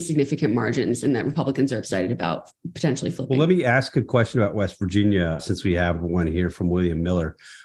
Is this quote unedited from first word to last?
no; 1 cut; at 5.4 s

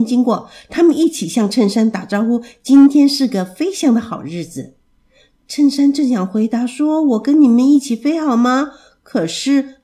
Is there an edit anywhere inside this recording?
no; 0 cuts

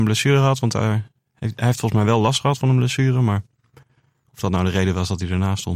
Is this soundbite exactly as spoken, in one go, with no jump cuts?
yes; 0 cuts

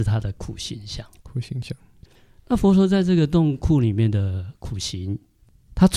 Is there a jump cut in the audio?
no; 0 cuts

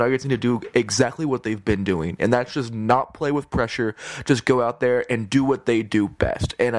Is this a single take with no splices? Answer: yes; 0 cuts

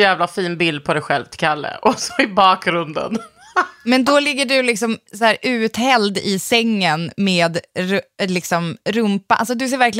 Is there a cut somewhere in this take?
no; 0 cuts

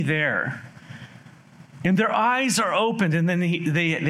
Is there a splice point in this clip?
yes; 1 cut; at 1.8 s

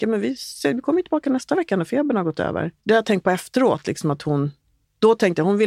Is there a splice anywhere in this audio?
yes; 1 cut; at 2.8 s

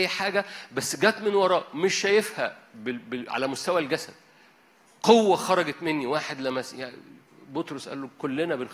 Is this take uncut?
yes; 0 cuts

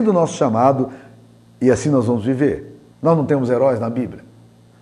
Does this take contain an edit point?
yes; 1 cut; at 2.9 s

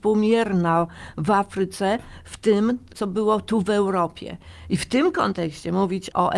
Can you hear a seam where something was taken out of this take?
no; 0 cuts

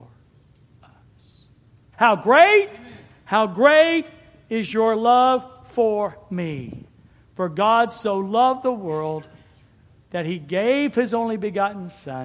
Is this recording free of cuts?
no; 1 cut; at 1.9 s

